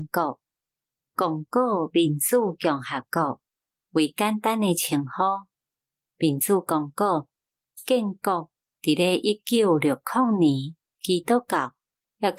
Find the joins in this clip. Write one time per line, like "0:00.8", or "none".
0:03.8
0:10.9